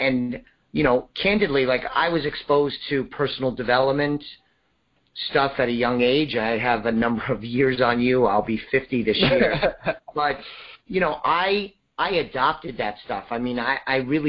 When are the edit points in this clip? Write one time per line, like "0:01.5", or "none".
none